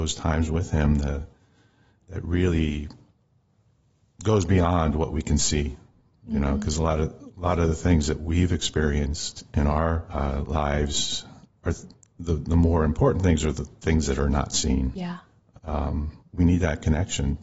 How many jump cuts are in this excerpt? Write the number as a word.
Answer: one